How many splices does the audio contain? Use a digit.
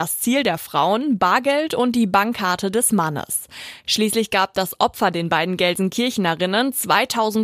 0